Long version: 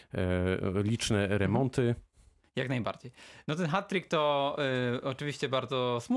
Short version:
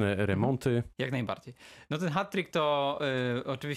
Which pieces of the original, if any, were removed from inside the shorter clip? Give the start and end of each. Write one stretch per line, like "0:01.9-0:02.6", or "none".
0:02.0-0:02.5